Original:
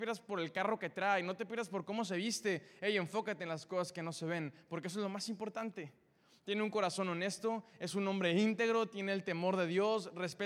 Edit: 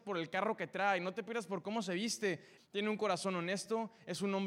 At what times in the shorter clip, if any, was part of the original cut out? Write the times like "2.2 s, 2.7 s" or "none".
2.6 s

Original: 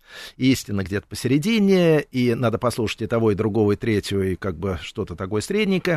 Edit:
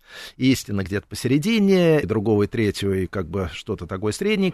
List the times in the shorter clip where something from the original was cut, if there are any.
2.0 s

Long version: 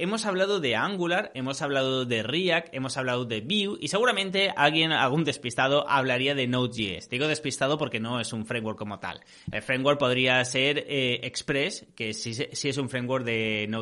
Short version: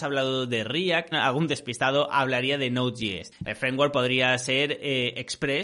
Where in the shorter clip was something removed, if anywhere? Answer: 1.1 s, 3.3 s

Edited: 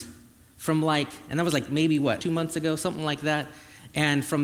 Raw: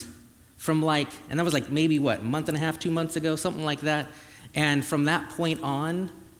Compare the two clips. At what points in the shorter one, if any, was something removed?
2.2 s

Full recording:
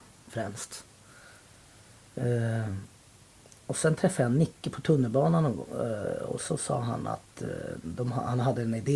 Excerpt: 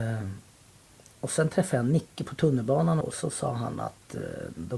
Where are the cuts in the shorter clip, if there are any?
3.0 s

